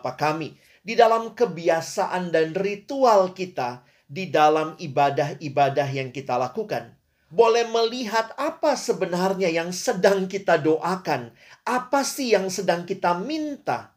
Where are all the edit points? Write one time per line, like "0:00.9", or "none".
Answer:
0:07.3

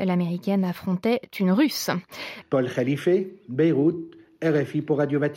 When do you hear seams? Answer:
0:02.4

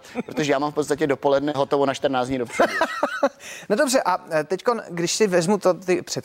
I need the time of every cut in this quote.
none

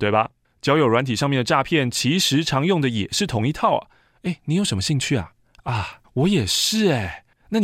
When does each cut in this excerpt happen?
0:06.0

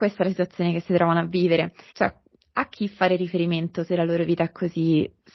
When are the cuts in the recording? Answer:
0:01.9

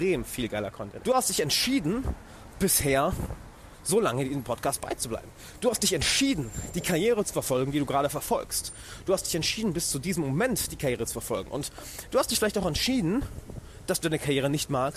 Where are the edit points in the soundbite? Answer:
0:01.0

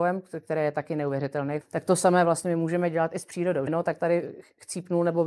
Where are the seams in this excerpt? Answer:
0:01.6
0:03.7

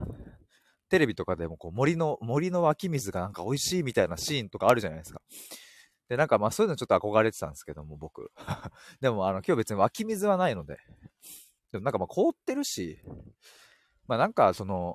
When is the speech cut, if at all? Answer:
none

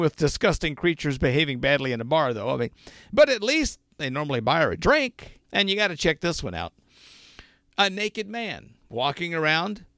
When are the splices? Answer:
0:05.4

